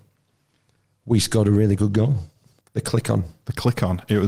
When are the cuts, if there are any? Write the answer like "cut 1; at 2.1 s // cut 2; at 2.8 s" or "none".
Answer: cut 1; at 2.6 s